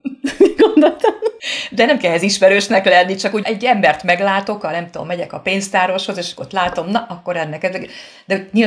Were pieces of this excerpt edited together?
yes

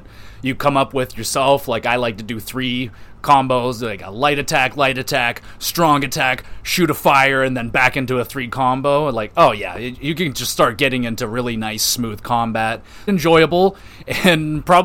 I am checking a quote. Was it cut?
yes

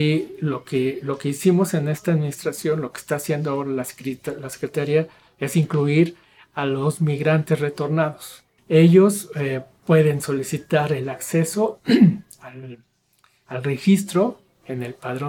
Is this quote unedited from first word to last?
no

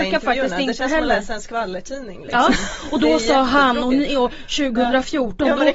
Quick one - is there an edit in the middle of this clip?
no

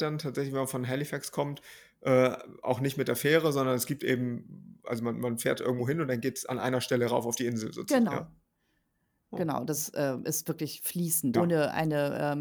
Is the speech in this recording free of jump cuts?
no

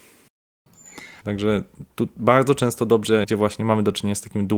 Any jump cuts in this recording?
yes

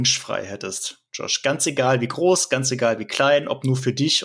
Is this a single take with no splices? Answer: yes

